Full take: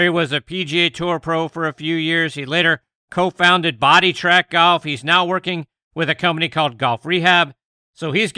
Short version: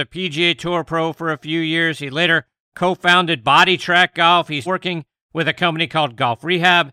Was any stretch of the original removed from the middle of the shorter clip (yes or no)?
yes